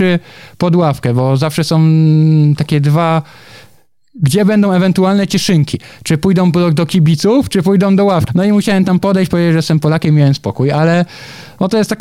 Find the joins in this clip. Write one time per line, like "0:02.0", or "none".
0:08.3